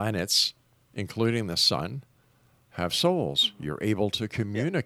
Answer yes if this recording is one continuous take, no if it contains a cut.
yes